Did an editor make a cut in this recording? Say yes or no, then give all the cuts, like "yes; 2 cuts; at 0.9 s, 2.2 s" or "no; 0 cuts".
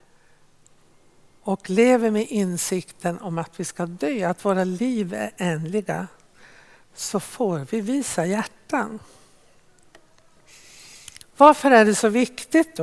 no; 0 cuts